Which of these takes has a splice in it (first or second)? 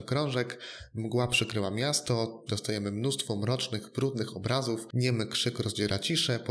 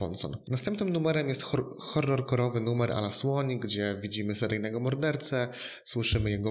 first